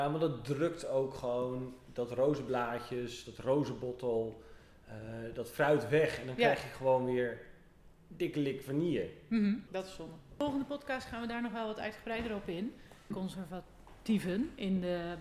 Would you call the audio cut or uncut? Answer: cut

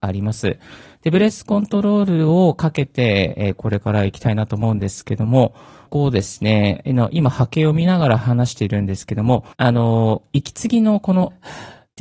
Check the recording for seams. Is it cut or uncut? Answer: cut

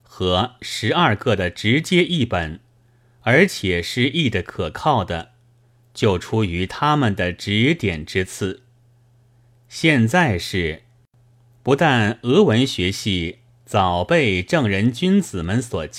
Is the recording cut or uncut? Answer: uncut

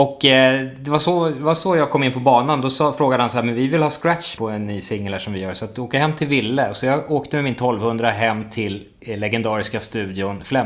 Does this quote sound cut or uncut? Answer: cut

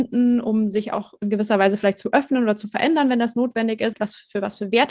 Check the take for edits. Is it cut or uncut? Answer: cut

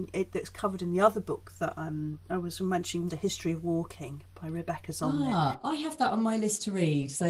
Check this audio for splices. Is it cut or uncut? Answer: cut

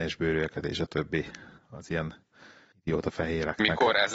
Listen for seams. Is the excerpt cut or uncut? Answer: uncut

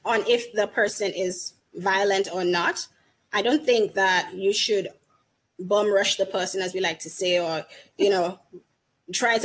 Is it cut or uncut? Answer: uncut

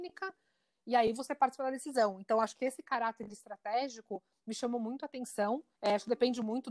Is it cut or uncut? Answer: cut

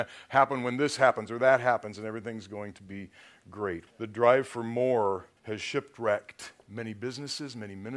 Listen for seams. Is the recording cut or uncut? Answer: cut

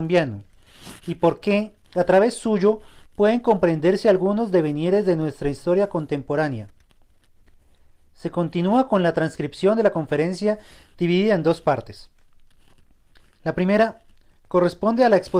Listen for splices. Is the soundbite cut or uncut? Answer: uncut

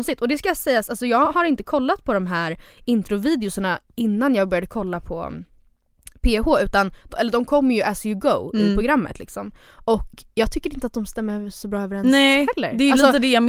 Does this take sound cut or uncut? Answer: uncut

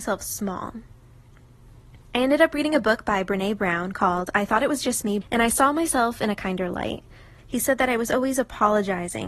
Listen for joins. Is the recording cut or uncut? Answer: cut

